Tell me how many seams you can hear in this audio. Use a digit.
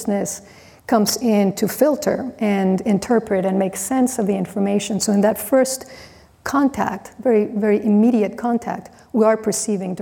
0